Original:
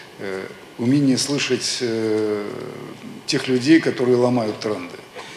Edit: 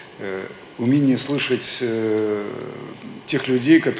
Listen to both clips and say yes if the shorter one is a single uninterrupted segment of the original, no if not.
yes